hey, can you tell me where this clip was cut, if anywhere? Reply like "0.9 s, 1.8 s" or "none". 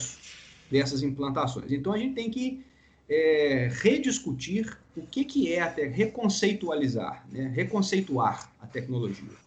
none